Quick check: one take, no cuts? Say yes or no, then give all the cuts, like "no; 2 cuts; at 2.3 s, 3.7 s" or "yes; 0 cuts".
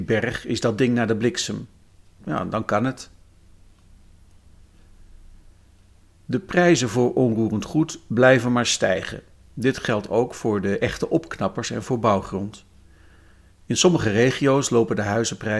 no; 1 cut; at 2.2 s